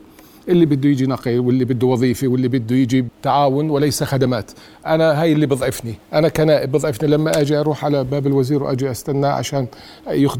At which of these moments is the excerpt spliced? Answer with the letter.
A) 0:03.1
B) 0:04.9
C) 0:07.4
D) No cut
A